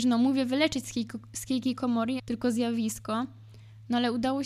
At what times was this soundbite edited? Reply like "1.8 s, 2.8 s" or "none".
2.2 s